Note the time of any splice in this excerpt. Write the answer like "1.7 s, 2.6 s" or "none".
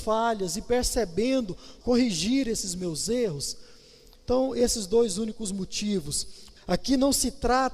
1.8 s, 6.6 s